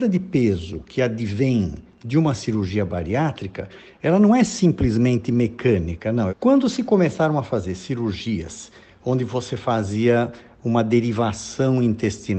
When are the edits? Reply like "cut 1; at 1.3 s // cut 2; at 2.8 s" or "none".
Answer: cut 1; at 6.3 s

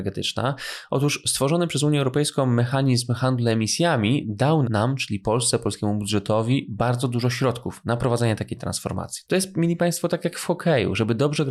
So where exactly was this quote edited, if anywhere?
cut 1; at 4.6 s // cut 2; at 9.3 s

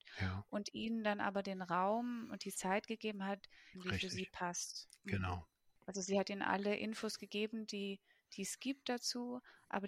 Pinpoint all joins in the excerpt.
cut 1; at 3.7 s

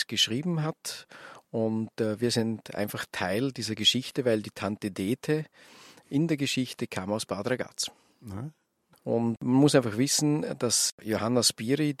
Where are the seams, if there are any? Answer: cut 1; at 1.4 s // cut 2; at 8.9 s

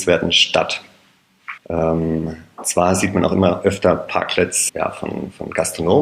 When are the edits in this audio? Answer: cut 1; at 1.6 s // cut 2; at 4.7 s

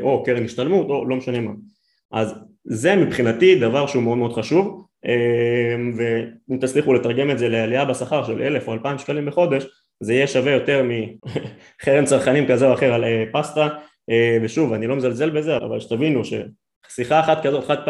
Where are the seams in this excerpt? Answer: cut 1; at 11.2 s // cut 2; at 15.6 s

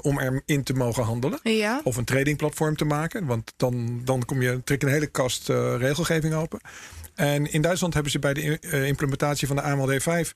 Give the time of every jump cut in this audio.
none

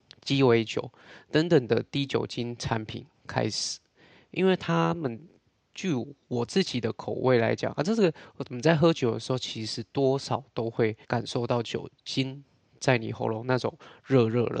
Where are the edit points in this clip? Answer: cut 1; at 11.0 s

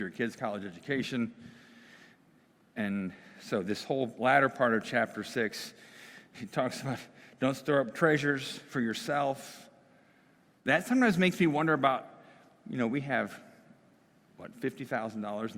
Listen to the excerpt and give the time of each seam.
cut 1; at 6.3 s

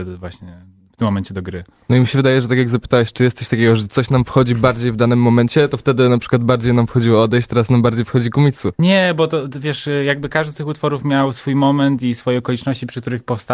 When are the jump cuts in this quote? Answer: cut 1; at 8.7 s

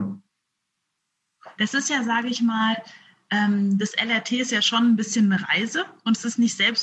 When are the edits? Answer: cut 1; at 1.6 s

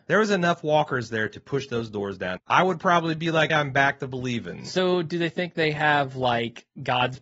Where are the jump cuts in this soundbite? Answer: cut 1; at 2.4 s // cut 2; at 3.5 s

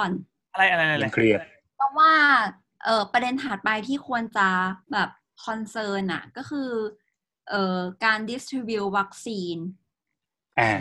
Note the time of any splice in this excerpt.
cut 1; at 4.8 s

